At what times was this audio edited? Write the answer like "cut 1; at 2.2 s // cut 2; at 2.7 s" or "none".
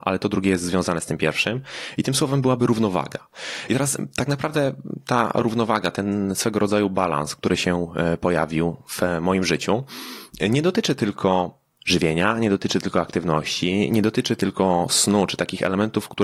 none